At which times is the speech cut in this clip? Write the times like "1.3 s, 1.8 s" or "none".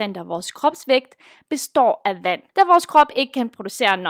2.5 s